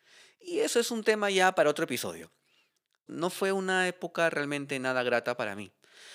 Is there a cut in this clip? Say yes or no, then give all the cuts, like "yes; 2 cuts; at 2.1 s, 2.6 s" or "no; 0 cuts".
yes; 1 cut; at 3.1 s